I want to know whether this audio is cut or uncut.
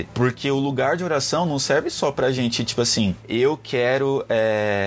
uncut